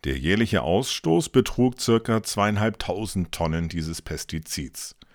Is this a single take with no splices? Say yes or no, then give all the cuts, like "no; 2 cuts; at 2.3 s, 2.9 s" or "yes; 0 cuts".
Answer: yes; 0 cuts